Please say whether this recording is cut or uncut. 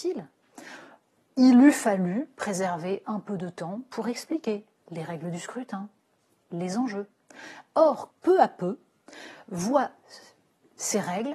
cut